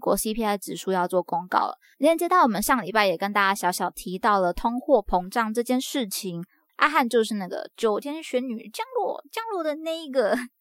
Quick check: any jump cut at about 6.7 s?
yes; 1 cut; at 6.7 s

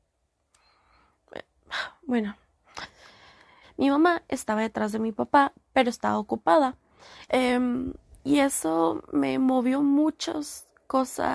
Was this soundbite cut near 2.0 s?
no; 2 cuts; at 3.6 s, 7.3 s

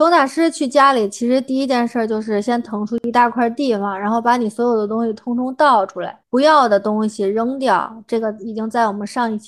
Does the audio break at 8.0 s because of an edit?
no; 1 cut; at 6.2 s

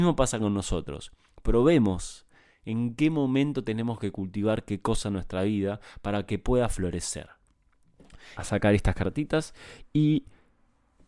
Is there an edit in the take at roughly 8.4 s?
yes; 1 cut; at 8.4 s

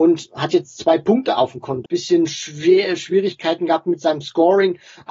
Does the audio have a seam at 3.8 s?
no; 1 cut; at 1.9 s

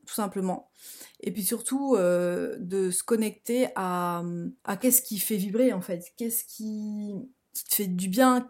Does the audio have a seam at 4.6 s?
yes; 2 cuts; at 4.6 s, 7.5 s

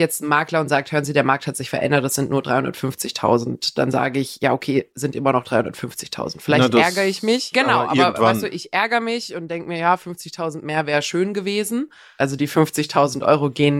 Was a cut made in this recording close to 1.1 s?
no; 2 cuts; at 7.5 s, 12.2 s

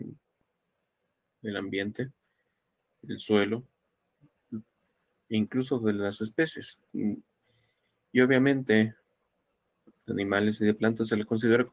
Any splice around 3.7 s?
no; 2 cuts; at 6.9 s, 9.9 s

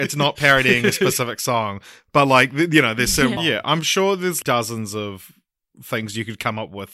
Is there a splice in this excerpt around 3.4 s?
yes; 2 cuts; at 3.4 s, 4.4 s

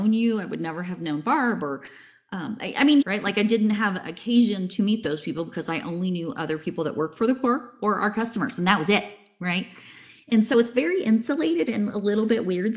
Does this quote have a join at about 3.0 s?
yes; 1 cut; at 3.0 s

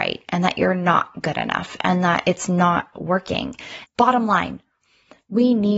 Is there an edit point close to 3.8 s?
yes; 1 cut; at 3.8 s

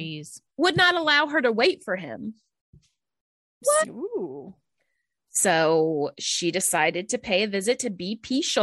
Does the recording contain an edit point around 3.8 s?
yes; 1 cut; at 3.8 s

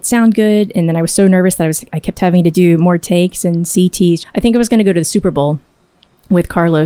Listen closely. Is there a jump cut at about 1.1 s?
no; 1 cut; at 4.2 s

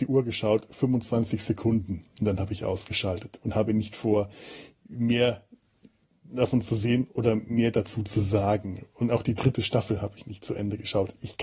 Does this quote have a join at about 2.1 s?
no; 0 cuts

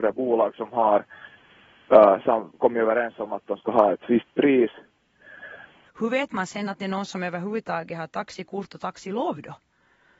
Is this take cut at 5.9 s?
yes; 1 cut; at 5.9 s

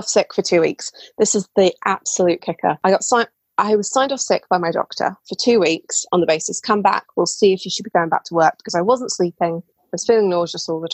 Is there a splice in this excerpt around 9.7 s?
yes; 1 cut; at 9.7 s

